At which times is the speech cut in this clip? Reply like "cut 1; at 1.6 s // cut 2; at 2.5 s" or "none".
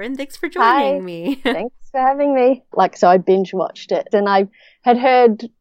cut 1; at 2.7 s // cut 2; at 4.1 s